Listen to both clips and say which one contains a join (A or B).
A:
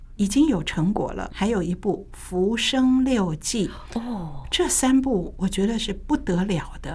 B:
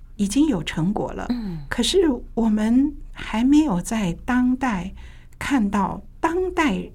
A